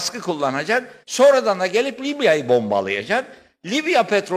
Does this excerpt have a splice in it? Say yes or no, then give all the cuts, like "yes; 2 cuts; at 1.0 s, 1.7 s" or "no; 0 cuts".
yes; 1 cut; at 1.0 s